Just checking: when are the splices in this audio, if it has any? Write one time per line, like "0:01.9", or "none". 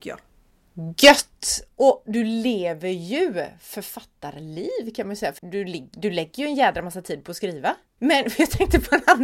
0:05.4
0:08.0